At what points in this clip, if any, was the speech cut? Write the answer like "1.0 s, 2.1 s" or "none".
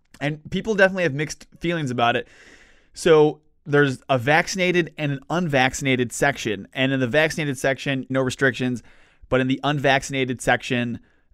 8.1 s